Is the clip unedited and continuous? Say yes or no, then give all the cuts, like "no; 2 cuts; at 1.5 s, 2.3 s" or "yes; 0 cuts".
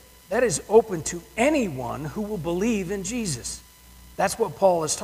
no; 1 cut; at 4.1 s